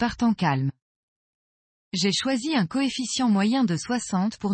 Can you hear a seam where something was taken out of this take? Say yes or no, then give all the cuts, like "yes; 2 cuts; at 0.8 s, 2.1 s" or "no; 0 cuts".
no; 0 cuts